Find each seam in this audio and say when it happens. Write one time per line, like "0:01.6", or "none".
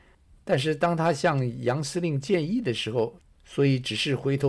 0:03.3

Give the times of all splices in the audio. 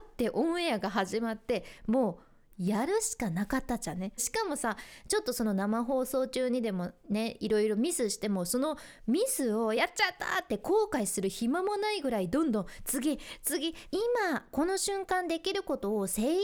0:04.2
0:13.9

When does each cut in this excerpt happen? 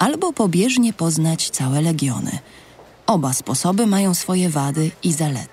none

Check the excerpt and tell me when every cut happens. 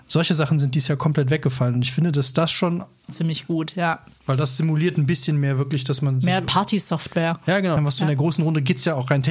0:03.1
0:07.8

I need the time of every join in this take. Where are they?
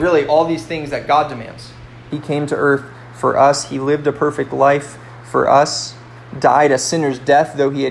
0:02.1

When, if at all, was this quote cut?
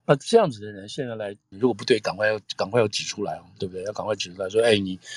0:01.5

